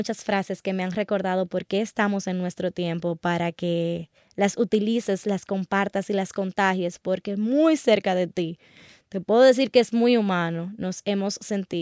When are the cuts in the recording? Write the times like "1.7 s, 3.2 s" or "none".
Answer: none